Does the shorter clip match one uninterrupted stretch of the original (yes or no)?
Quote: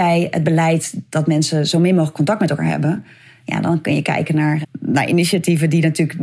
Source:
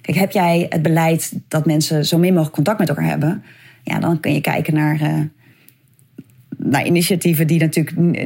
no